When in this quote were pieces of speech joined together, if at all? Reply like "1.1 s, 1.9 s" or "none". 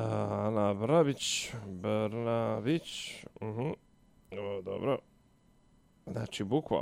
none